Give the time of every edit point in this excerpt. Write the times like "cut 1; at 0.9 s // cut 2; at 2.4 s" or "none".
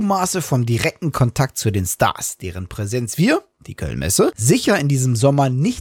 none